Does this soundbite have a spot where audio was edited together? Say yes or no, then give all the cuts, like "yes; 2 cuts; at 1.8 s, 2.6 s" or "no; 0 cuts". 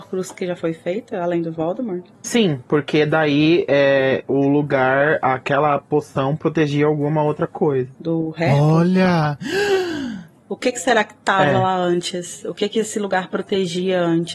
yes; 3 cuts; at 2.1 s, 7.9 s, 10.4 s